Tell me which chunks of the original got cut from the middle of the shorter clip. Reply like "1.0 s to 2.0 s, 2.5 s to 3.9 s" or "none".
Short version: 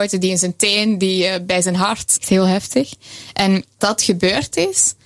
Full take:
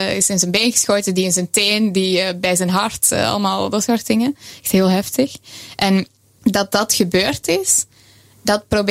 3.1 s to 4.6 s, 6.2 s to 6.7 s